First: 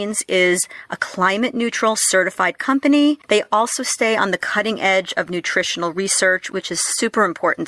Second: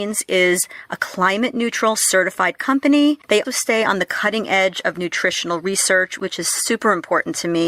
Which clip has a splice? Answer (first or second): second